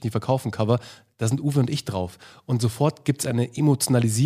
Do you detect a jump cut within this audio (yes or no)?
no